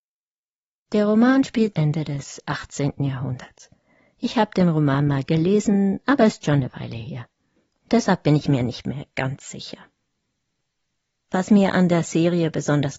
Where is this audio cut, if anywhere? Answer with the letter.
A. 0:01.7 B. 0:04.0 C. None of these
A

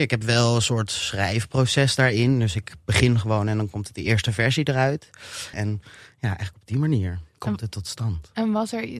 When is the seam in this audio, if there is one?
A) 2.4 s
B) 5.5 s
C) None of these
B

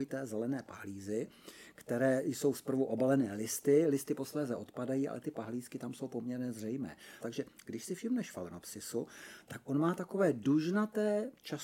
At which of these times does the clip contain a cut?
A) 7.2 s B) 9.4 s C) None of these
A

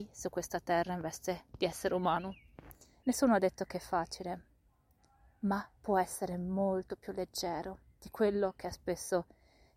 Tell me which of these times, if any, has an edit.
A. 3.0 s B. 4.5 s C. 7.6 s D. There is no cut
A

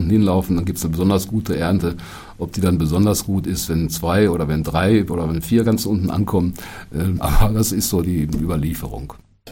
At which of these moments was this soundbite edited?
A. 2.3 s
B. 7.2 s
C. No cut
B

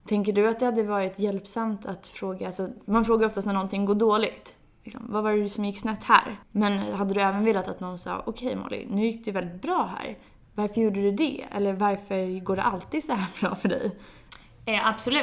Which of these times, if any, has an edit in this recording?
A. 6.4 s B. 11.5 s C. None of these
A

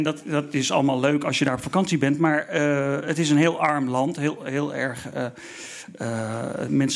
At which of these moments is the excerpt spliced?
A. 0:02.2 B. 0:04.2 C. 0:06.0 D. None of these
D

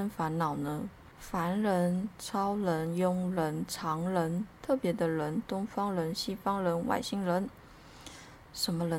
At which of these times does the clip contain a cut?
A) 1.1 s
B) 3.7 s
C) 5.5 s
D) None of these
D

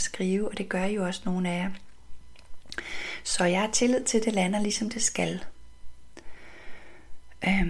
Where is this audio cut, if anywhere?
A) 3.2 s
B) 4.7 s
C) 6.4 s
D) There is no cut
D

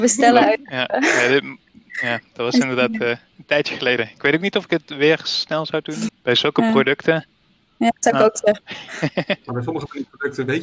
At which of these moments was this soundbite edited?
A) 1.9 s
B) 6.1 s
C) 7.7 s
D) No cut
B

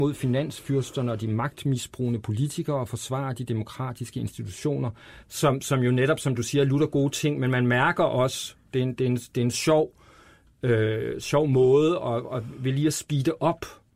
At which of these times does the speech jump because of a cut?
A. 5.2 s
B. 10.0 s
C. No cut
A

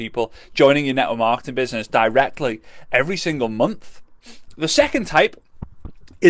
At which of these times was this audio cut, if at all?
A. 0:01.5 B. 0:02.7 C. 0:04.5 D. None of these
C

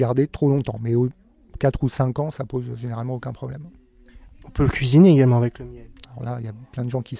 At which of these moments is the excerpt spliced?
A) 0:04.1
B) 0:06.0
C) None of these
B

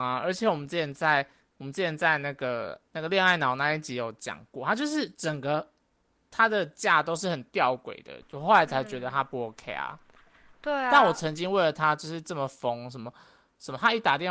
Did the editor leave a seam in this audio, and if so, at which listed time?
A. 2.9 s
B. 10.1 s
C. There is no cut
A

